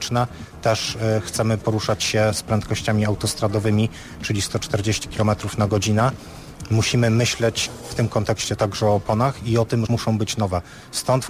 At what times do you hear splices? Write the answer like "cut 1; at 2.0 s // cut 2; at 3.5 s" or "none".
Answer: cut 1; at 9.9 s